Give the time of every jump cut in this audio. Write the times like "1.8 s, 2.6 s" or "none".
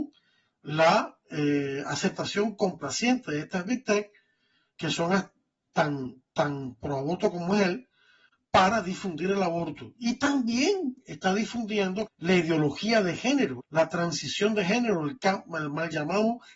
12.1 s, 13.6 s